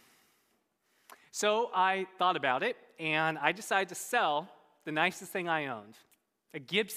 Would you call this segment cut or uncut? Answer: uncut